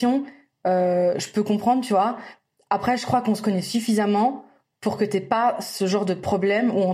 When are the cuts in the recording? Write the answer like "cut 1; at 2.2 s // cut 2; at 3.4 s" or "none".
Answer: none